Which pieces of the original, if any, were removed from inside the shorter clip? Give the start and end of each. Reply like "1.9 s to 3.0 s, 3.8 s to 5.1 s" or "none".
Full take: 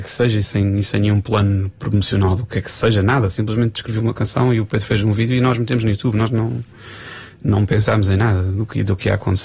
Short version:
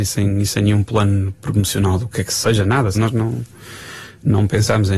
3.3 s to 6.1 s